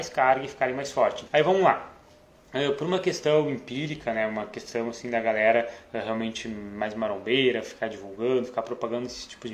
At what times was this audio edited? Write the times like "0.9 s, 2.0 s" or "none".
1.3 s